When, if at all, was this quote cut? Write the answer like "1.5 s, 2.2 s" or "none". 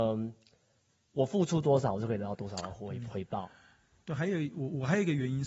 none

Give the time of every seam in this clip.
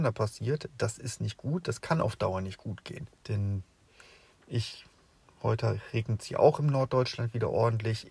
3.2 s

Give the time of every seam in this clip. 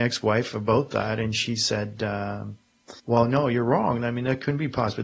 3.0 s

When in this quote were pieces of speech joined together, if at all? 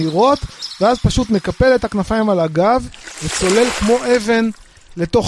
none

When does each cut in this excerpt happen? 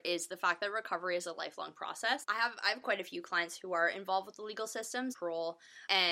2.2 s, 5.1 s

